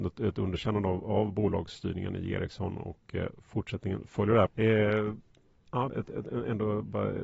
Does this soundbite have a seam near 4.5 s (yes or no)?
yes